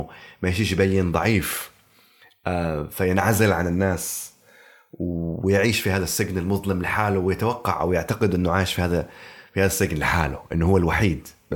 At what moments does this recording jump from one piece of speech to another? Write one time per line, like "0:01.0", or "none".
none